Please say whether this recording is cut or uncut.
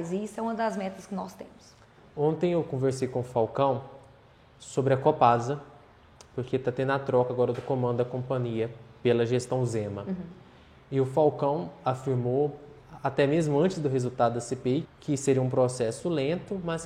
cut